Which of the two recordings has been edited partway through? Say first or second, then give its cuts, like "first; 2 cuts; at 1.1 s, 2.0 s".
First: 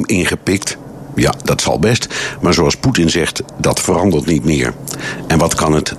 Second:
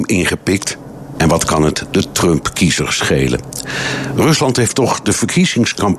second; 1 cut; at 1.1 s